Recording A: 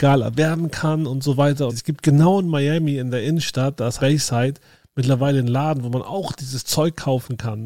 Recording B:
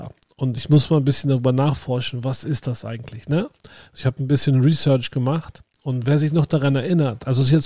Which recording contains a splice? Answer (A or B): A